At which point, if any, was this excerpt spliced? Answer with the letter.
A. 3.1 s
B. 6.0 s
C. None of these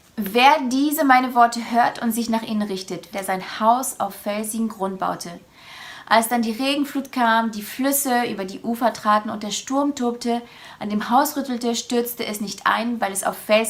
A